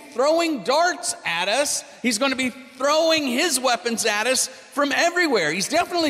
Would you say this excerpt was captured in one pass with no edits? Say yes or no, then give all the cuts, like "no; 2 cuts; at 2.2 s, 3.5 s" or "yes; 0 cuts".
yes; 0 cuts